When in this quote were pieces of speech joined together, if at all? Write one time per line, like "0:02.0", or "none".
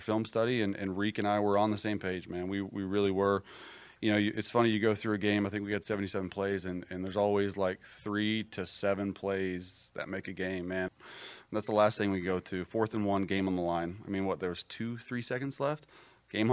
0:10.9

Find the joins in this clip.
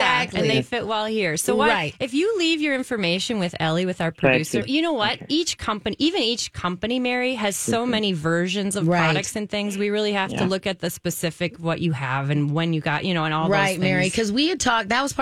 0:04.6

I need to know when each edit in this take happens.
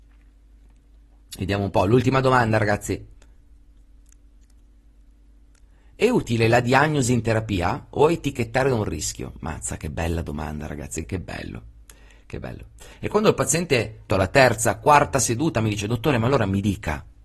0:11.0
0:12.9
0:14.1

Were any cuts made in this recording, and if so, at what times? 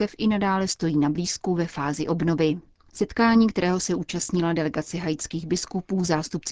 none

